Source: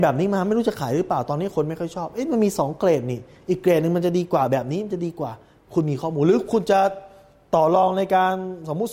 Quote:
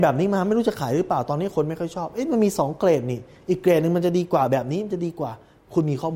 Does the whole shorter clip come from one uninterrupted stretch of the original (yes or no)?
yes